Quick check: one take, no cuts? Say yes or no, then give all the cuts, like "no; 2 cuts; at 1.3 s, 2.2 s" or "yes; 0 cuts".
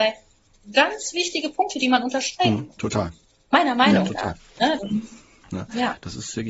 no; 2 cuts; at 2.7 s, 4.8 s